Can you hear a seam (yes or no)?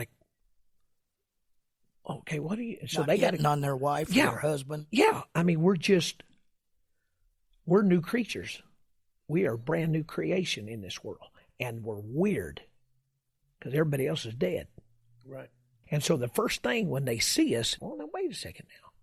yes